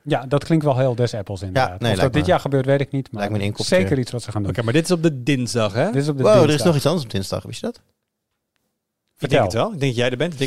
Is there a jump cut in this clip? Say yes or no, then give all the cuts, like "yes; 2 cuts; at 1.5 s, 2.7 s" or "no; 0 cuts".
no; 0 cuts